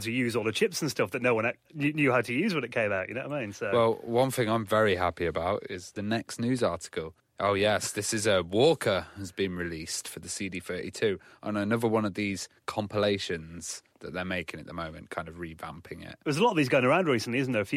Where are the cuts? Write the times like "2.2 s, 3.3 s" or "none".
7.2 s

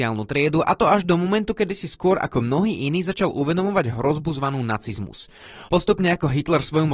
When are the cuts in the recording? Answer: 5.7 s

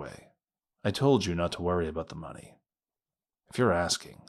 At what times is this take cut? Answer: 3.3 s

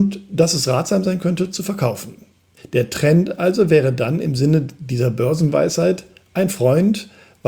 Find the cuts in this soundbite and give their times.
2.6 s

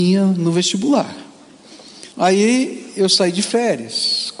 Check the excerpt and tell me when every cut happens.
2.1 s

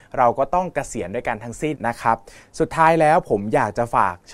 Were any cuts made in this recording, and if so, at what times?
1.7 s

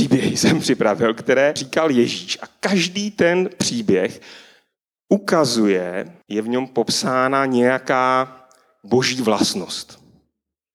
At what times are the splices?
1.6 s, 6.2 s

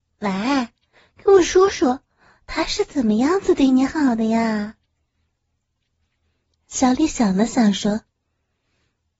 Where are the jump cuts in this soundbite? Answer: none

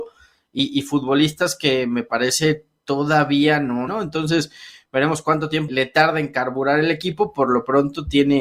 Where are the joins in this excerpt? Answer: 3.9 s, 5.7 s

